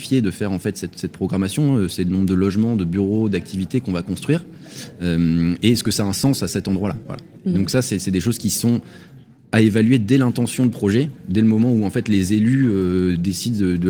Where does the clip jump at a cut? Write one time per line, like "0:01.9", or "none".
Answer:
none